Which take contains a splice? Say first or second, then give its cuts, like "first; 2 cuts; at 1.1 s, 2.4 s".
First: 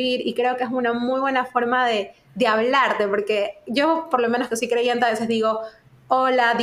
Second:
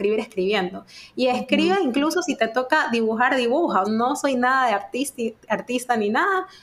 second; 1 cut; at 3.8 s